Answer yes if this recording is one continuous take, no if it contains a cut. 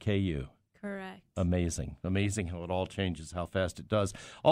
yes